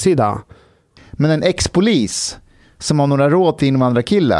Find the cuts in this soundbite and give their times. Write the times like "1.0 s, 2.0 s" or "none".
1.0 s